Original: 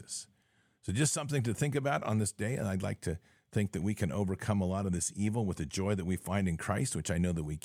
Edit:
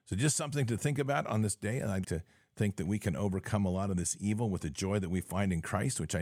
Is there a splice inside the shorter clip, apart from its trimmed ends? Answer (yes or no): yes